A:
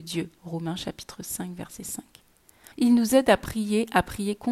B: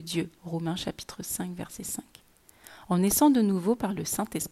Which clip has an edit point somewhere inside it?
A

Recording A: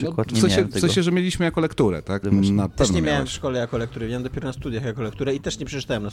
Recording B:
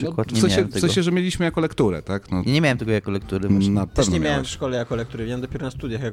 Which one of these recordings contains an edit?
A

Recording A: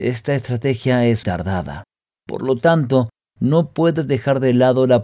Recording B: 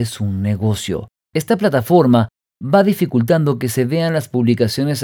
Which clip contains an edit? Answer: A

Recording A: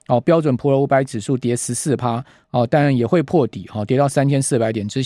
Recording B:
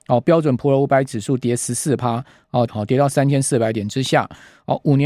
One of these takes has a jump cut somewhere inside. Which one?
B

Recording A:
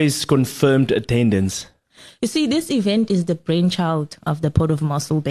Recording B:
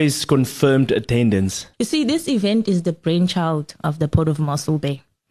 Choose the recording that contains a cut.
B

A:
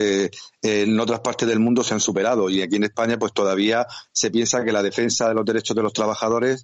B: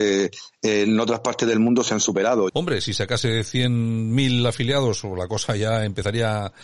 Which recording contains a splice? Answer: B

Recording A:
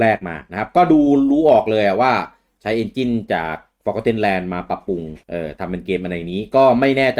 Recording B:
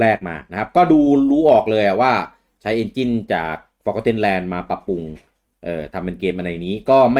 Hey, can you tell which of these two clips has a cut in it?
A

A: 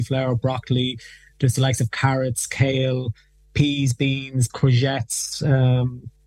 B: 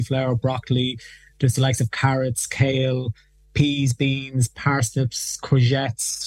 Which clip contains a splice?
A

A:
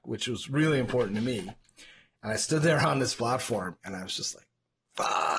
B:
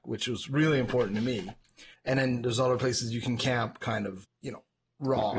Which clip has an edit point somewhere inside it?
B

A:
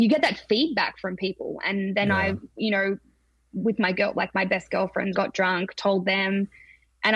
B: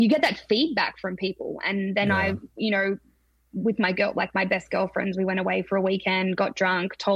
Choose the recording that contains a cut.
A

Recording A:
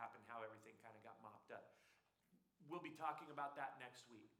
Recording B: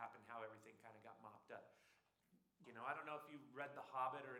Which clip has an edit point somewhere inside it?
B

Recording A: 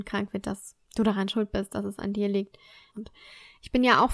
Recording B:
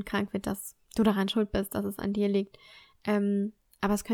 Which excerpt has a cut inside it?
A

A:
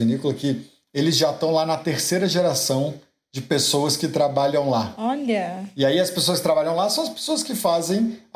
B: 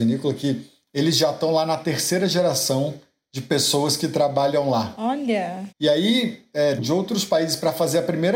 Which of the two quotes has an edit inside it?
B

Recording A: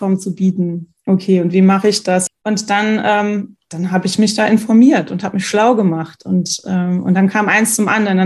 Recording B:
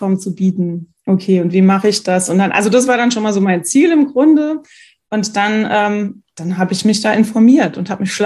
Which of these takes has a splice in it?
A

